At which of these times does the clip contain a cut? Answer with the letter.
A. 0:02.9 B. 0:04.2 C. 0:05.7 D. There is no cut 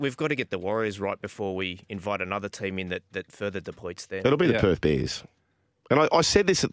D